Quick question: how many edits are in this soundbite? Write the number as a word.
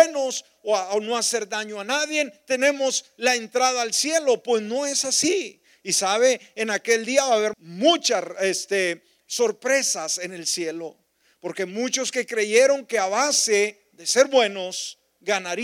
one